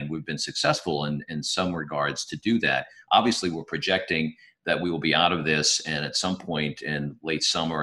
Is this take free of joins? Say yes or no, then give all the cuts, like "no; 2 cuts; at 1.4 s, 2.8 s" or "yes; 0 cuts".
yes; 0 cuts